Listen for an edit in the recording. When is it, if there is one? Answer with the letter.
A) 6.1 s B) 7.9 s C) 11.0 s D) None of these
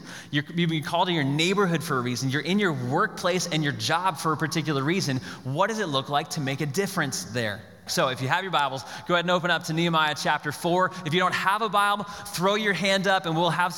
B